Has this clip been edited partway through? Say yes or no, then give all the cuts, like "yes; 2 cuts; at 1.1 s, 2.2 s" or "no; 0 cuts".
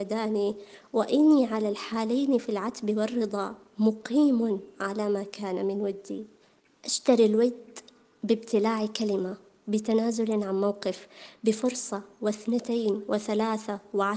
no; 0 cuts